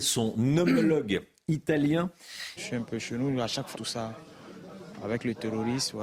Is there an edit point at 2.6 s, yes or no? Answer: yes